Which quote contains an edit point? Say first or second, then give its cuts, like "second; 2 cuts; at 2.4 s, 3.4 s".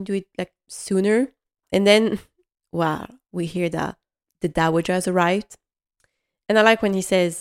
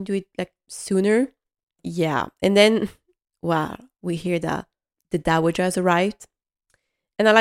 first; 1 cut; at 1.6 s